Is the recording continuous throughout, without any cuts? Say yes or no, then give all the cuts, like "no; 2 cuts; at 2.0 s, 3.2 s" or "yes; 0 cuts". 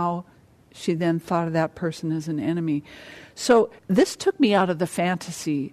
no; 1 cut; at 3.8 s